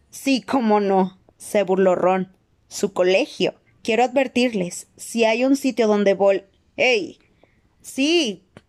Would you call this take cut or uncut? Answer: cut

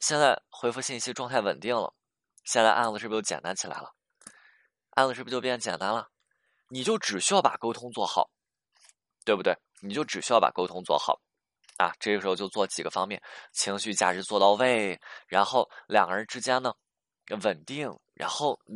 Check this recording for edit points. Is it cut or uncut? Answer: uncut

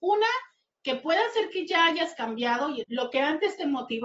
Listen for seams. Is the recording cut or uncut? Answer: cut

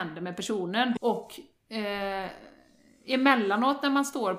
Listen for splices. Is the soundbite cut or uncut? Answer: cut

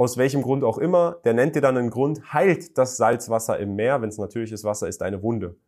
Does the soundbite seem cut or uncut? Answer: uncut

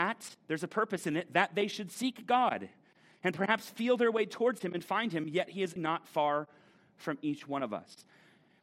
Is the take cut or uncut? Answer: cut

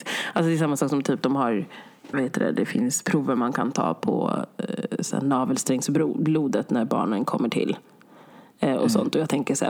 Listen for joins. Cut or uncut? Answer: cut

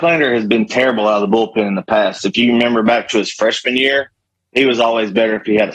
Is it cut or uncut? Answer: uncut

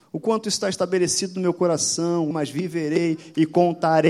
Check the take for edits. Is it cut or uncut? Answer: cut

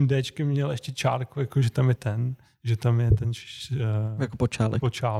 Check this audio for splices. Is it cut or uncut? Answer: cut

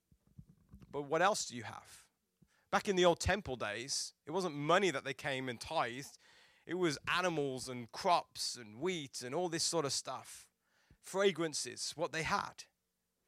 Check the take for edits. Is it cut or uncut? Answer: uncut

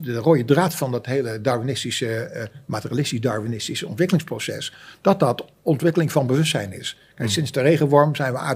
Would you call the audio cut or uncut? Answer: uncut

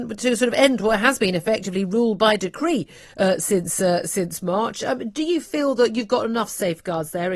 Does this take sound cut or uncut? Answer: uncut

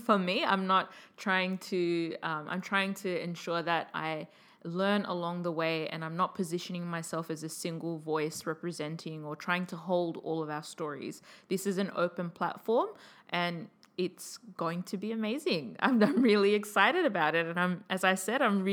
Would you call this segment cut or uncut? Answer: uncut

